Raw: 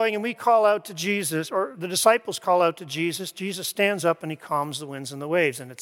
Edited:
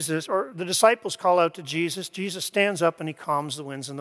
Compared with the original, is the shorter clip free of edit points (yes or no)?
yes